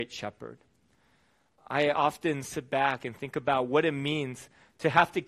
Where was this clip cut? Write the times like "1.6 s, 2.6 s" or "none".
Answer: none